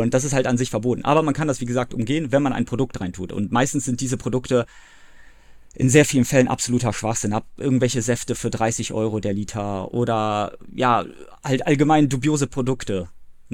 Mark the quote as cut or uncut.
uncut